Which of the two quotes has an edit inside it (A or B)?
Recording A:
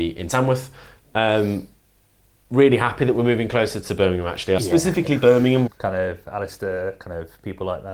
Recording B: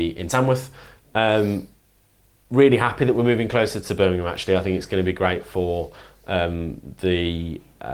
A